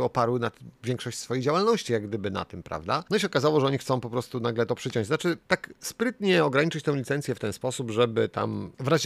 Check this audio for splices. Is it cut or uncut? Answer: uncut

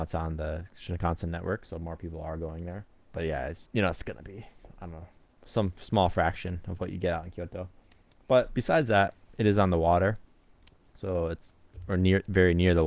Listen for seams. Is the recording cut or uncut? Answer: cut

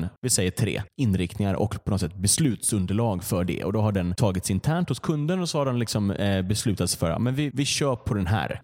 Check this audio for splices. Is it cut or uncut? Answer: cut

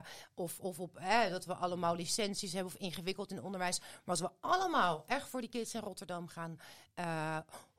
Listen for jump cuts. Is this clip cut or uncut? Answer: uncut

